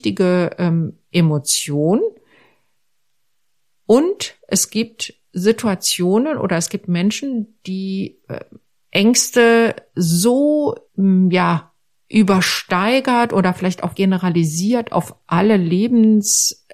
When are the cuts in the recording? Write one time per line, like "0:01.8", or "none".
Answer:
0:10.8
0:13.9